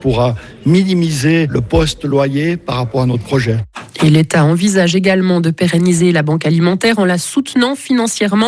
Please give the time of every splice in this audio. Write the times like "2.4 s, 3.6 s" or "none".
none

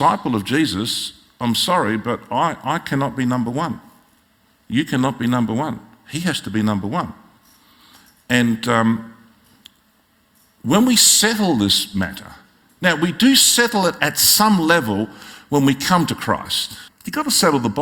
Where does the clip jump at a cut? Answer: 14.0 s, 16.9 s

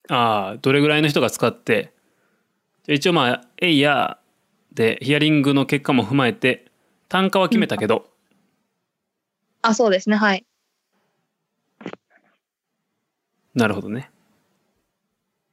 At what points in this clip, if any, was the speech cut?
2.8 s

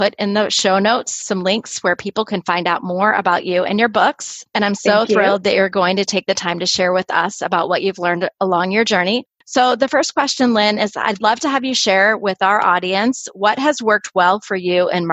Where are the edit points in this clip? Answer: none

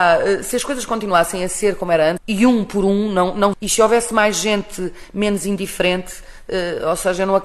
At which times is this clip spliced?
2.2 s, 3.5 s

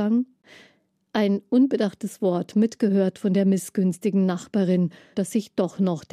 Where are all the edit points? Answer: 5.1 s

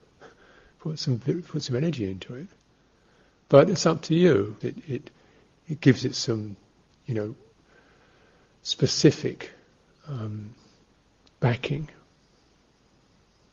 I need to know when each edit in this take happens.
4.6 s

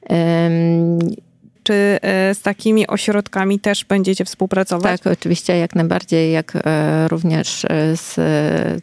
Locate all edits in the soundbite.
1.6 s

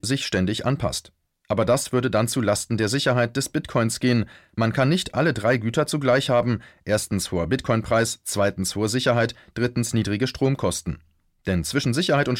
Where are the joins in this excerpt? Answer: none

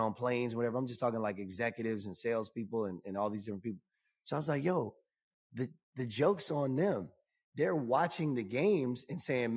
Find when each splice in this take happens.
none

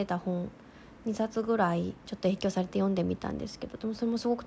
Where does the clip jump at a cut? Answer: 2.0 s

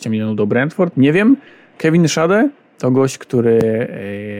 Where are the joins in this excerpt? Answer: 0.9 s

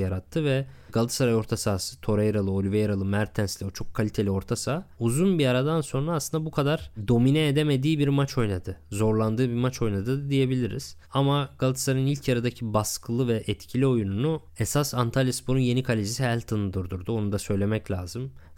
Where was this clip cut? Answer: none

